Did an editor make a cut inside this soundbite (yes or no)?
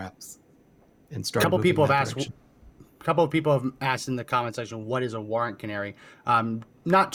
no